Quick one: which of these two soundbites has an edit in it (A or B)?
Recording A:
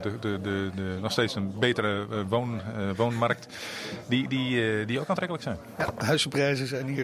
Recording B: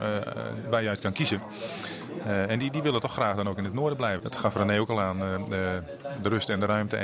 B